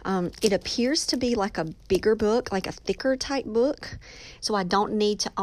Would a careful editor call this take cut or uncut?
cut